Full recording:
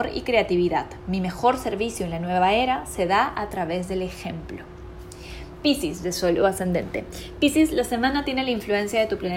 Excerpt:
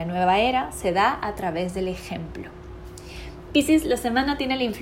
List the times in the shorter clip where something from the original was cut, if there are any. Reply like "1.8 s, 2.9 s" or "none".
3.5 s

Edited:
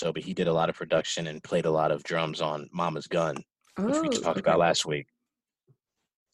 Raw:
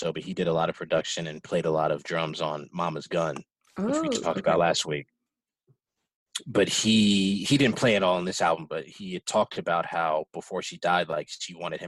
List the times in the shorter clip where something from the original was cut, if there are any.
none

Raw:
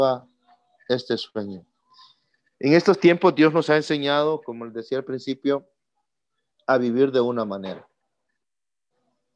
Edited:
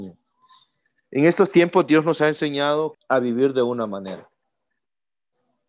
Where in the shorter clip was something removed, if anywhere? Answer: 2.9 s

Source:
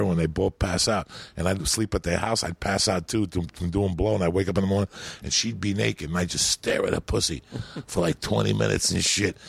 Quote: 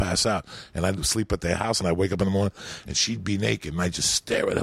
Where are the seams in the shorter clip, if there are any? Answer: 1.8 s

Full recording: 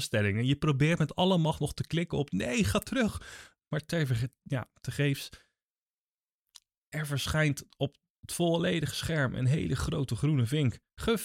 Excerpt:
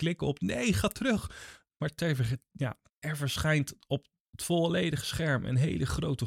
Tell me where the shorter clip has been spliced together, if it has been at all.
2.9 s

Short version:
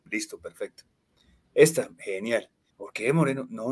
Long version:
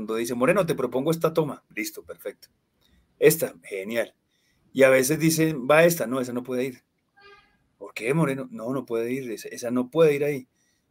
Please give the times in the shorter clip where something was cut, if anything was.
2.7 s

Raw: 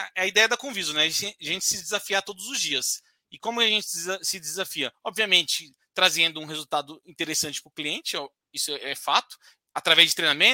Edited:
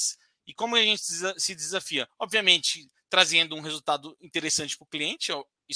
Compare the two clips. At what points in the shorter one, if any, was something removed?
none

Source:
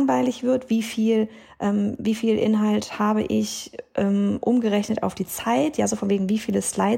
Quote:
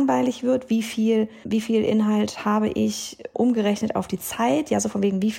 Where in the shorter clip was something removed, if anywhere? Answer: 1.4 s, 3.3 s

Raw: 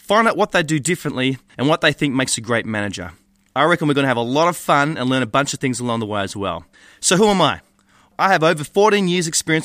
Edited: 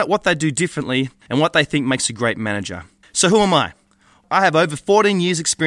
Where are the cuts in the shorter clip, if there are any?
3.0 s

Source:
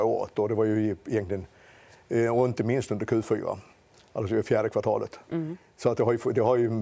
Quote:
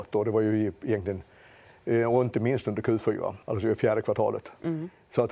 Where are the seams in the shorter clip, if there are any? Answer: 3.4 s

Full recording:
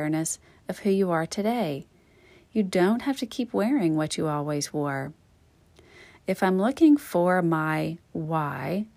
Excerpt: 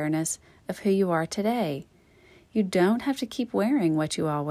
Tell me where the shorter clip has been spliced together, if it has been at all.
none

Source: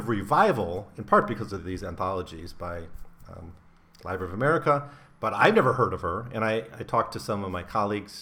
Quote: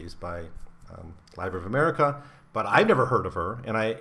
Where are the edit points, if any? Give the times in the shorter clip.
1.3 s

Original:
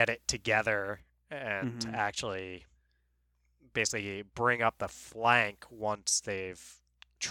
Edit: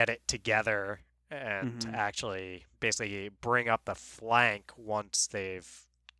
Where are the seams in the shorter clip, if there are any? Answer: 2.7 s

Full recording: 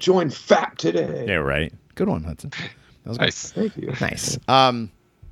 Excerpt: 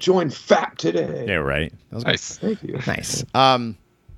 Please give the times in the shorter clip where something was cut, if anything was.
1.8 s

